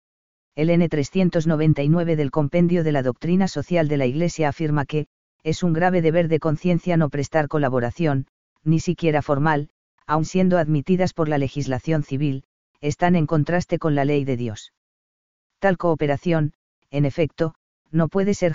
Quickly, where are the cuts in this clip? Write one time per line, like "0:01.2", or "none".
0:10.0